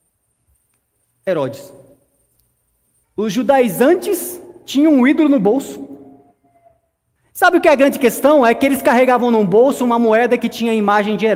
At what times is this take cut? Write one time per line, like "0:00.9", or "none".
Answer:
0:03.0
0:07.2